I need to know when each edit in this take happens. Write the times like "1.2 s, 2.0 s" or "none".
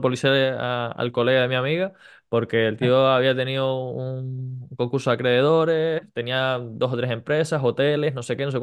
none

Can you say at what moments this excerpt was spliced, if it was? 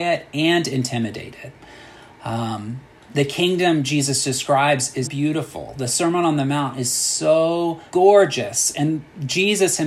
5.0 s, 7.9 s

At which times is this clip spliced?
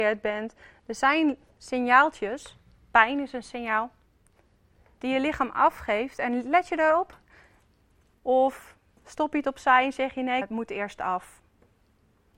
8.1 s, 10.4 s

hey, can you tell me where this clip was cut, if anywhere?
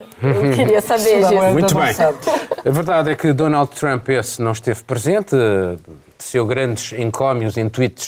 none

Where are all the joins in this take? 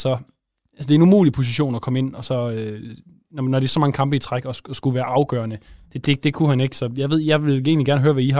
none

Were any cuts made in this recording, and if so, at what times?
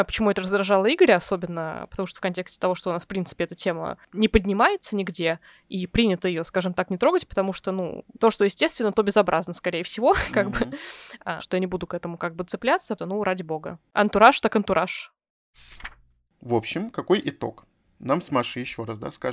11.4 s, 13.0 s

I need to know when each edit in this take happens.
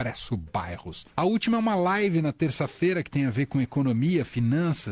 1.1 s

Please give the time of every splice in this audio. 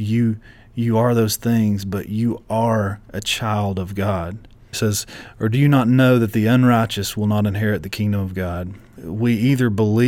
4.7 s, 9.0 s

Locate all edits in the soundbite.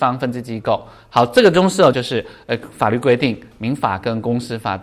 1.9 s

